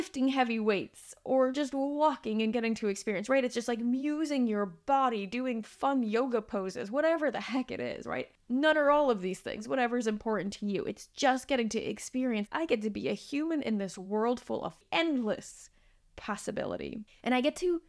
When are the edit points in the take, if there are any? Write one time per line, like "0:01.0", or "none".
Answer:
0:12.5